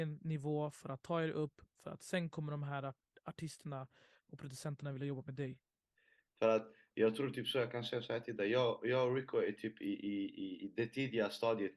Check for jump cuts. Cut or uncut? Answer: uncut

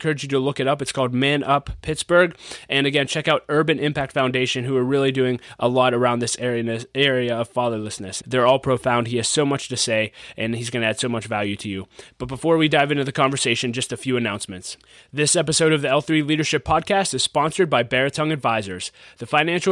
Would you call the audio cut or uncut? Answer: cut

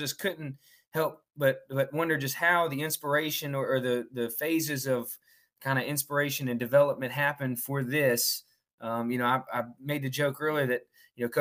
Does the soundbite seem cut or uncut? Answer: uncut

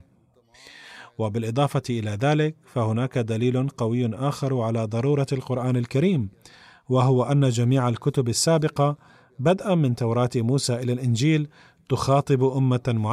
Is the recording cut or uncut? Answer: uncut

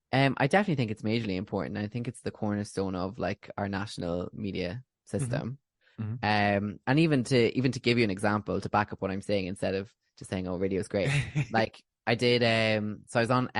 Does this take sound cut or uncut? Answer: uncut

